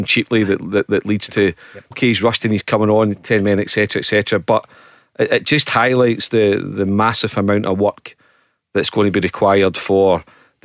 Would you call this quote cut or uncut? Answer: cut